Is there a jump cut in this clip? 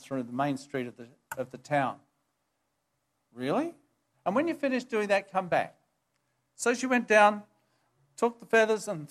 yes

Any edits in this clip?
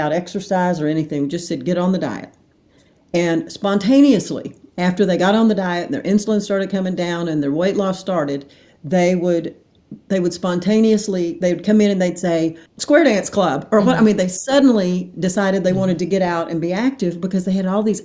yes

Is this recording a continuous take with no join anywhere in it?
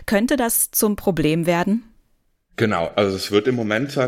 yes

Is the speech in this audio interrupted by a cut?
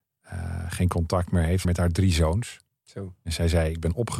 yes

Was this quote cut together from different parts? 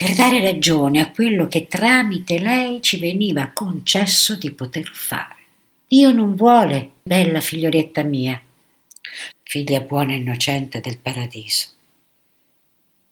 yes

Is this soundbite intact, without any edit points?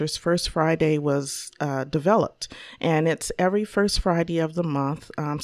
yes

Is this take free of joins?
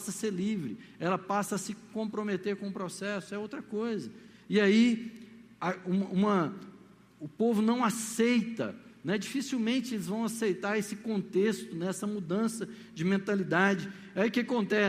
yes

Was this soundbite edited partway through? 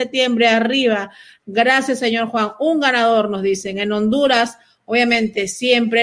no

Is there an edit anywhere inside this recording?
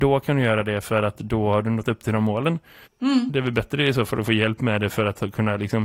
yes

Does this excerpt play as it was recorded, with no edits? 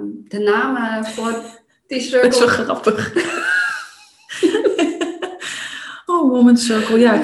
yes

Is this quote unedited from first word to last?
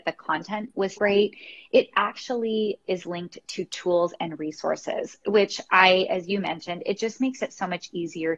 no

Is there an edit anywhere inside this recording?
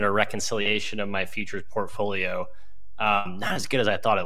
no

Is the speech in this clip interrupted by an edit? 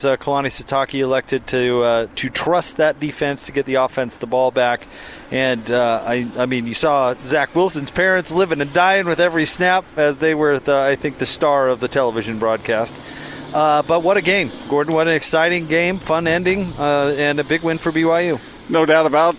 no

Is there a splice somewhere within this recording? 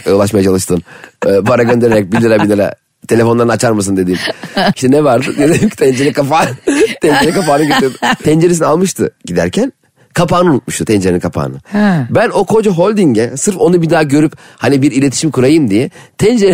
yes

